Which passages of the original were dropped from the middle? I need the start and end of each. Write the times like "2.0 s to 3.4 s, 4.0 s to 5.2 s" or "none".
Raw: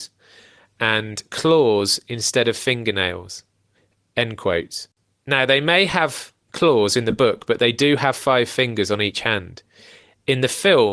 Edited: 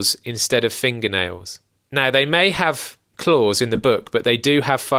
3.6 s to 5.1 s